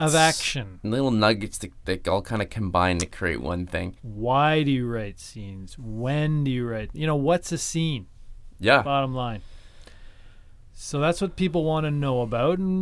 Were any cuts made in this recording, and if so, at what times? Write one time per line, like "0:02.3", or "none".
0:04.0